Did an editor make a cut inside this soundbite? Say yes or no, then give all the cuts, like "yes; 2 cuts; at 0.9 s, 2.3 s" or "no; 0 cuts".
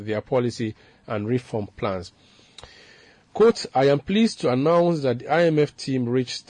no; 0 cuts